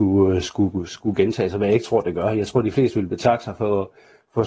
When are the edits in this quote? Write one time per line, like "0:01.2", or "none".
none